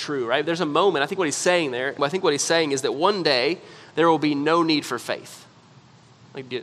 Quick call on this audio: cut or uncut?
cut